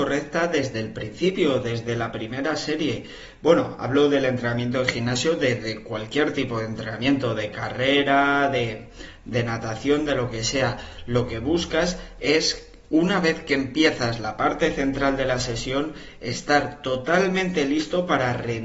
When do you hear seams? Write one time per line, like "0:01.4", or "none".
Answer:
none